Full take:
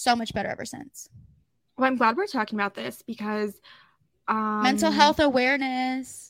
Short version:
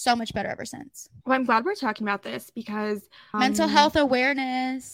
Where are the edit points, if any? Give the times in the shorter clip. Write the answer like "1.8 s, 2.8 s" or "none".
1.2 s, 3.3 s